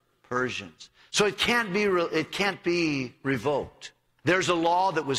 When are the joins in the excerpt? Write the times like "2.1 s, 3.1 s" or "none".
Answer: 4.2 s